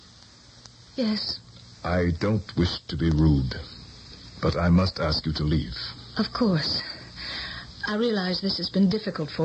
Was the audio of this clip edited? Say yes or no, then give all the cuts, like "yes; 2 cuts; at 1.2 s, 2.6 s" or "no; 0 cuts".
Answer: no; 0 cuts